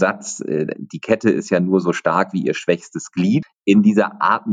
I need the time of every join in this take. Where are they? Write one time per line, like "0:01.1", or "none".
0:03.4